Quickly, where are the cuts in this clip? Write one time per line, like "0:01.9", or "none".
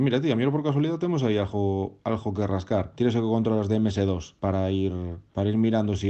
0:02.9